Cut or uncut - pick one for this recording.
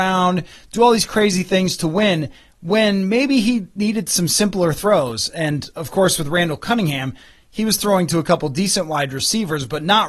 uncut